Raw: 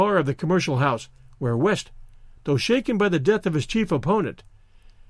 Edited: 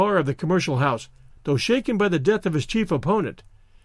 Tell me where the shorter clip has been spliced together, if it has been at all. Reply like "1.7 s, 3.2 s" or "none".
1.3 s